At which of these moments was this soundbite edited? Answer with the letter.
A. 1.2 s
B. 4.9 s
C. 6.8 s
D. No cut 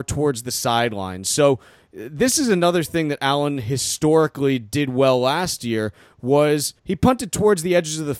C